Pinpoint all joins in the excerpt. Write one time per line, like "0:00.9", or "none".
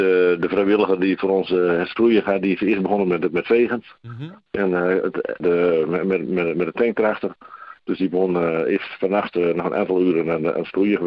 0:05.4